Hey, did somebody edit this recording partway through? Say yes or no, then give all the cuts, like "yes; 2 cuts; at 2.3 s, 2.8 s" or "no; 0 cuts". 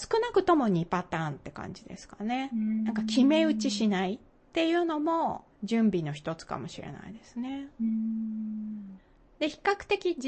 no; 0 cuts